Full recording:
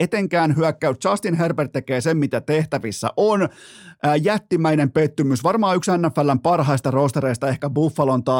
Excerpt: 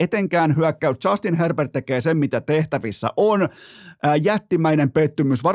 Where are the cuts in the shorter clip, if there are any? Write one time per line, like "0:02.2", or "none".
none